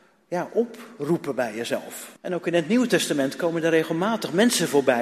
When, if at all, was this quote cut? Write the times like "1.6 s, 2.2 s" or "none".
2.2 s